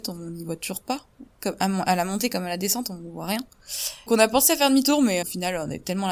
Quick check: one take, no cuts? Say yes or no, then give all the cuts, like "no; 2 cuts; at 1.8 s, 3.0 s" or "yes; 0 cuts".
no; 2 cuts; at 4.1 s, 5.2 s